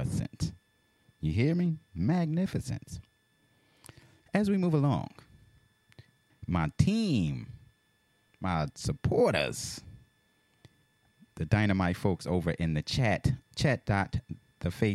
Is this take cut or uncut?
cut